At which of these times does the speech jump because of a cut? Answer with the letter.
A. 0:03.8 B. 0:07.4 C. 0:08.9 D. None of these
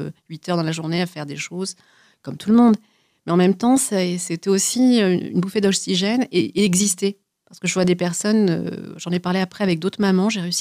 D